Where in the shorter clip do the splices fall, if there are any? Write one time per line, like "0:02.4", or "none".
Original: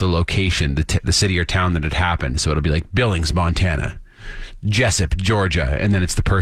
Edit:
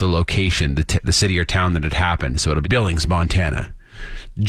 0:02.6